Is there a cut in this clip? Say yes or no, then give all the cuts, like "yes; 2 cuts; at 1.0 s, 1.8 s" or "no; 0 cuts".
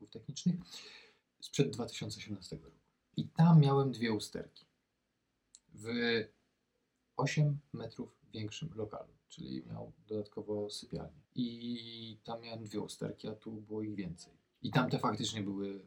yes; 2 cuts; at 3.1 s, 11.3 s